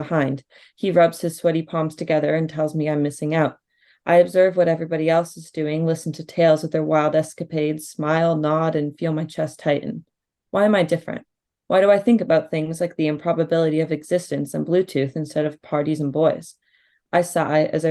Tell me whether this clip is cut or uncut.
uncut